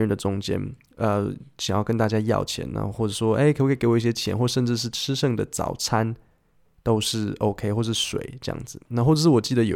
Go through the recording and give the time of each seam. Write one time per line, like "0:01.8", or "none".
0:08.8